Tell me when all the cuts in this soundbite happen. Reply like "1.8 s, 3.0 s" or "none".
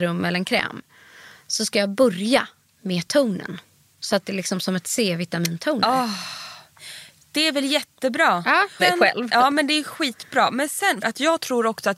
8.8 s, 11.0 s